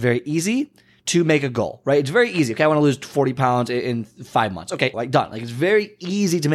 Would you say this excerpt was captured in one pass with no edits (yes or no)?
no